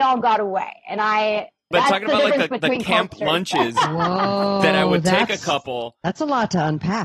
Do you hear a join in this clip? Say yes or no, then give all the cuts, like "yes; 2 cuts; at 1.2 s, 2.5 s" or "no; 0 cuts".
yes; 1 cut; at 1.7 s